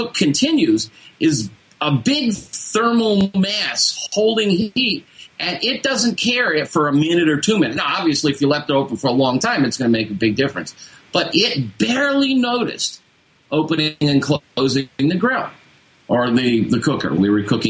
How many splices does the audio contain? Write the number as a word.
zero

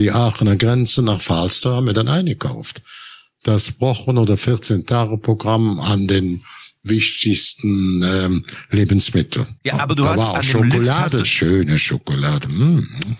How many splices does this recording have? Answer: two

